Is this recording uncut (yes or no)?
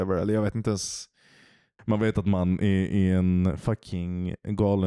no